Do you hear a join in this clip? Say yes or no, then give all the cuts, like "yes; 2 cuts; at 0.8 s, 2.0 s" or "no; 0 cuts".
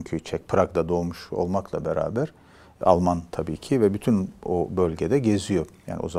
yes; 1 cut; at 2.8 s